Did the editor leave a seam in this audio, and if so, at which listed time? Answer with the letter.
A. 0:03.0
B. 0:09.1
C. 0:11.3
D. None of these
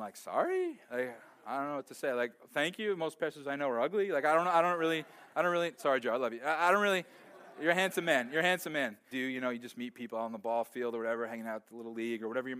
B